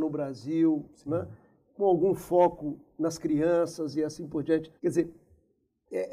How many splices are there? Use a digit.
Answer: 1